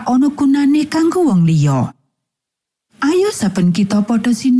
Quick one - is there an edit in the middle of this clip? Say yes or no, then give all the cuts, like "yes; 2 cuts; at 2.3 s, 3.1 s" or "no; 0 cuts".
no; 0 cuts